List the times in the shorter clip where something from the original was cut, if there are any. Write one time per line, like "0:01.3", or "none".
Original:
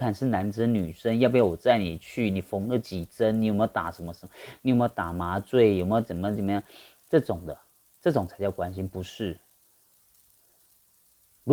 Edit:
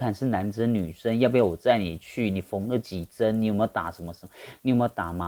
none